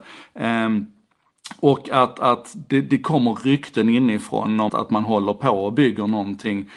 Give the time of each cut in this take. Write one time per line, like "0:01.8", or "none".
0:04.7

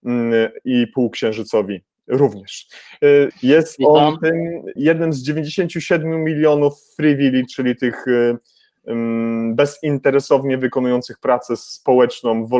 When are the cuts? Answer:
0:03.3
0:04.8

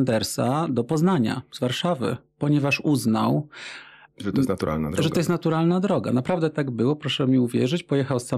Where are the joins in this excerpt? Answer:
0:04.1

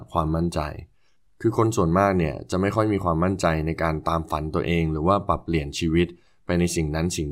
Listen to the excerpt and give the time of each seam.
none

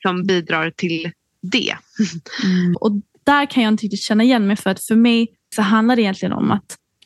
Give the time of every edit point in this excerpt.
0:02.7
0:05.5

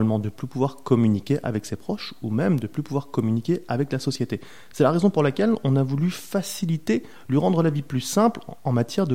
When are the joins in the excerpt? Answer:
none

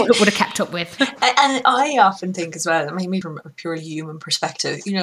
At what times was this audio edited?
0:03.2

